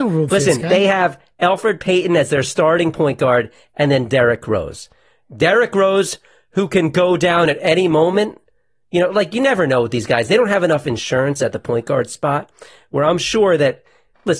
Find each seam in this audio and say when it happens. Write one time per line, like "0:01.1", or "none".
none